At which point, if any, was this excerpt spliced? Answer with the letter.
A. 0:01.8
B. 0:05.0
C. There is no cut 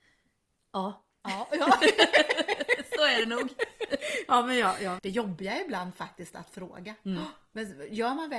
B